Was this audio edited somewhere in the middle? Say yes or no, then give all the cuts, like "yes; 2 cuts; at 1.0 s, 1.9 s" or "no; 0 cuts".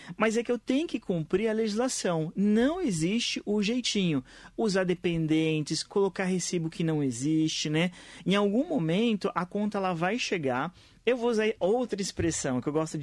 no; 0 cuts